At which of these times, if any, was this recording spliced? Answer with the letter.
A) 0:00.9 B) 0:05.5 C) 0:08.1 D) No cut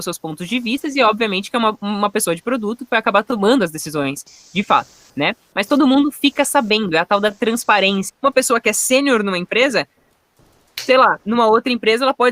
C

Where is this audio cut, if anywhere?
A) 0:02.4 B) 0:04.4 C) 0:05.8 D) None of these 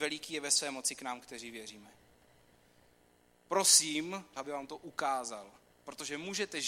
B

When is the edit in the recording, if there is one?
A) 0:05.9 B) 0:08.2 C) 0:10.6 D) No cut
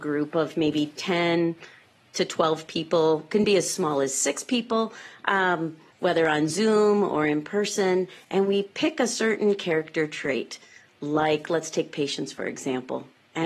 A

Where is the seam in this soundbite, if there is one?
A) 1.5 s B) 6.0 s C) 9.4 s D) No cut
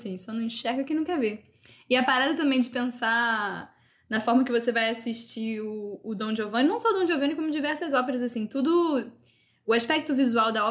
D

